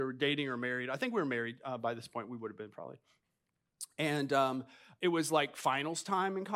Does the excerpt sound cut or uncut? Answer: uncut